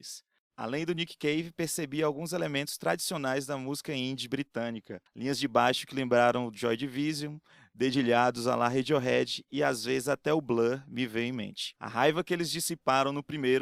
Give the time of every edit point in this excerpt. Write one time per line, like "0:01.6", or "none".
0:11.8